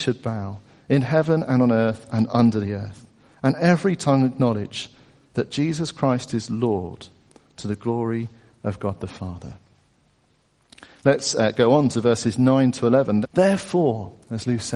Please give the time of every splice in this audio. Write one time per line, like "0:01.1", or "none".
0:10.9
0:13.2